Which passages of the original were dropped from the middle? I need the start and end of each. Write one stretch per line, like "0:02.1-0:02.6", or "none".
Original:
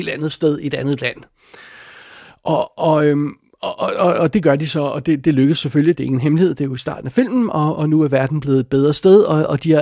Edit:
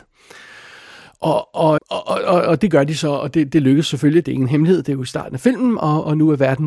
0:03.0-0:03.5